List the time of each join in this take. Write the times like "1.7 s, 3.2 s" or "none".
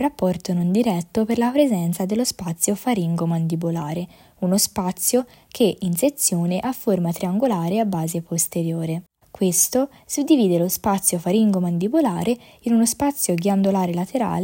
9.2 s